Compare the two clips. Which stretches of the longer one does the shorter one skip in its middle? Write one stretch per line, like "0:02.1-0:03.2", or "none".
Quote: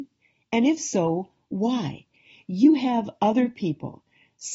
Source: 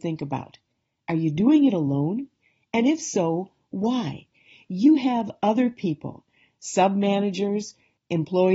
none